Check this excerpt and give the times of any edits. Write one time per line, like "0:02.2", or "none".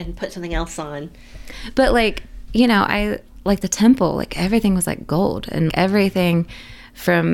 0:05.7